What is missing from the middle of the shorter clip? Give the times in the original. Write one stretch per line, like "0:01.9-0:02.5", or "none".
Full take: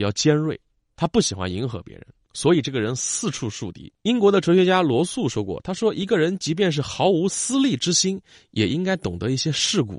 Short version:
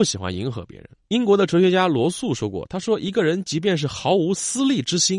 0:02.2-0:04.0